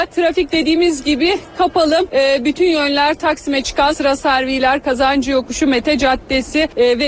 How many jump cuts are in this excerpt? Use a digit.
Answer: 1